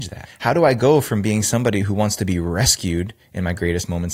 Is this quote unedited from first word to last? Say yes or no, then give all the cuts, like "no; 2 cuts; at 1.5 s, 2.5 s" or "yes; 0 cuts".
yes; 0 cuts